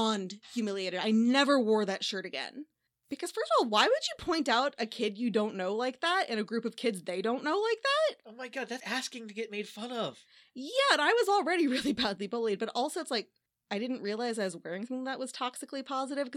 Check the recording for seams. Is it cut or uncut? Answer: cut